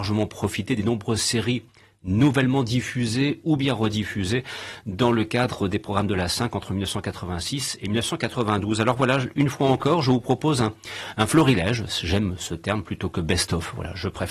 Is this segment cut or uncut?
uncut